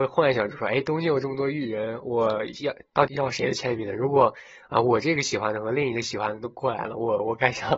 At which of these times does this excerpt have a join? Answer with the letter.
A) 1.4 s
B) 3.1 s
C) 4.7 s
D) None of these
B